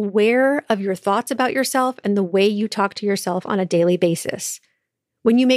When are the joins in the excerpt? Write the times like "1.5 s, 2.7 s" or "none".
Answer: none